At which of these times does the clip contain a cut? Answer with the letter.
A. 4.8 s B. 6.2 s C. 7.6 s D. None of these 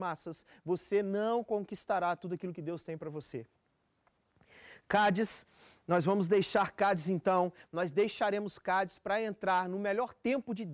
C